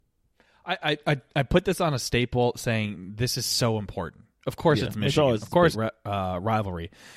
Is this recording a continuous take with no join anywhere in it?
no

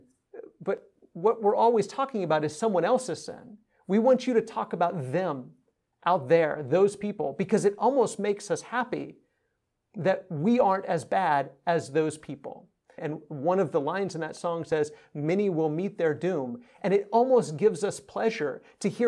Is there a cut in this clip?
yes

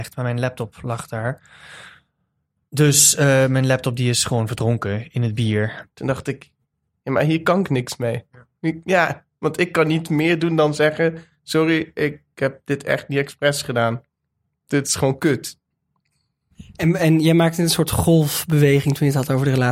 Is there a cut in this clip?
yes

